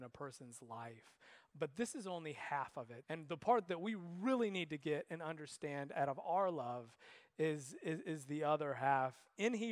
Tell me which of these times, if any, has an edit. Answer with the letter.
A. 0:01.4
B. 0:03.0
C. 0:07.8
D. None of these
B